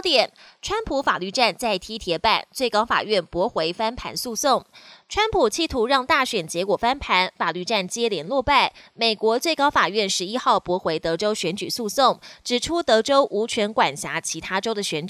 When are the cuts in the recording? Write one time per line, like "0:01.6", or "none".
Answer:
none